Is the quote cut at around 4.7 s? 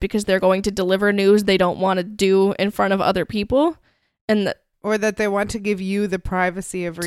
yes; 1 cut; at 4.7 s

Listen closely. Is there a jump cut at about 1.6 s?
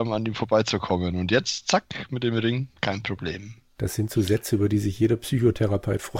no; 0 cuts

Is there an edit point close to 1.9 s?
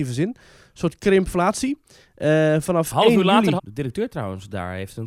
no; 1 cut; at 3.6 s

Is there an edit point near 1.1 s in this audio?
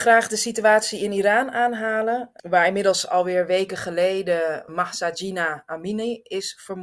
no; 2 cuts; at 2.4 s, 4.7 s

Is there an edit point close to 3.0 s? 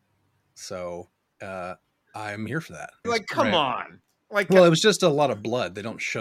yes; 1 cut; at 3.0 s

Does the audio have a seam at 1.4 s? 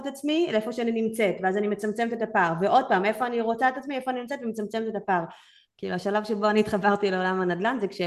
no; 1 cut; at 5.7 s

